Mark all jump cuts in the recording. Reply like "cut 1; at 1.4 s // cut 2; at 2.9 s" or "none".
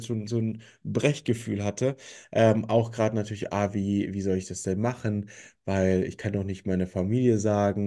cut 1; at 2.2 s